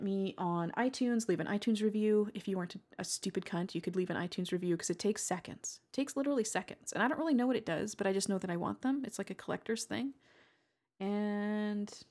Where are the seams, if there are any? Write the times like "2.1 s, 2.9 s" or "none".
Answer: none